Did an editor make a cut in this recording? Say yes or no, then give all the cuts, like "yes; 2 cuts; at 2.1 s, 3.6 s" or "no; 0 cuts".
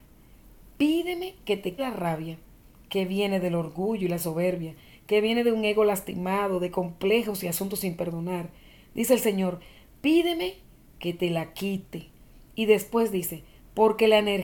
yes; 1 cut; at 1.8 s